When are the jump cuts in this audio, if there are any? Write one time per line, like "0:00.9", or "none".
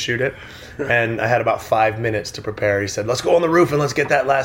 none